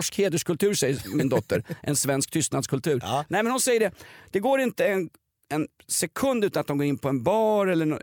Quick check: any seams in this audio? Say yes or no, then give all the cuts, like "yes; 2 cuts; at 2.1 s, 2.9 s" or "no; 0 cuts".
no; 0 cuts